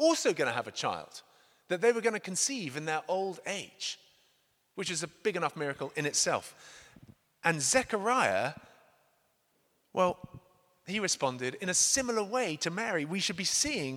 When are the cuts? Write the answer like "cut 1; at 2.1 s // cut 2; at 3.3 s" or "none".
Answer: none